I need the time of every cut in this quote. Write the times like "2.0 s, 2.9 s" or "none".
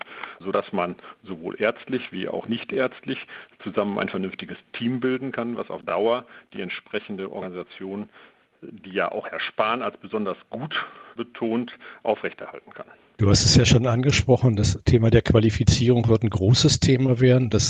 none

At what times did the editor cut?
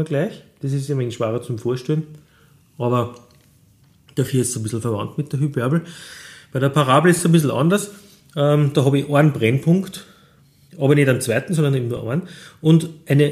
none

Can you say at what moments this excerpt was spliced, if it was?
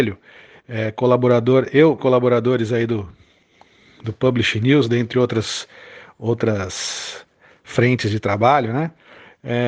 2.0 s

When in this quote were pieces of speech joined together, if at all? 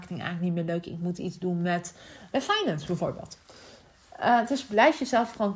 2.3 s

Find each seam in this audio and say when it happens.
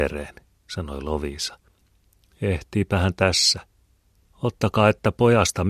4.2 s

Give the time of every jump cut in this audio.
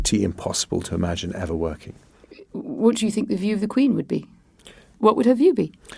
4.9 s

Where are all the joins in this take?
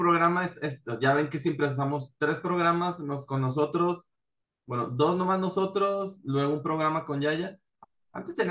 none

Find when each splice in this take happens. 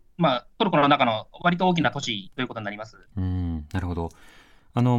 3.1 s

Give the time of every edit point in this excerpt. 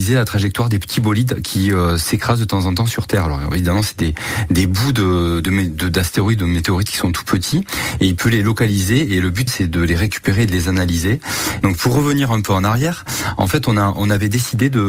9.5 s, 11.6 s

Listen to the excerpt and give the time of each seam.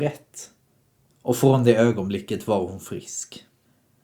1.1 s

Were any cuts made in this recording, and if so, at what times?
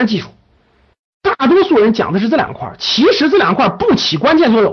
none

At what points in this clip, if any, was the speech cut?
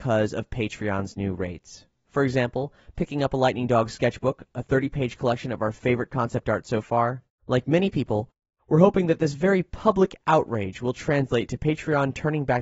2.1 s, 7.4 s

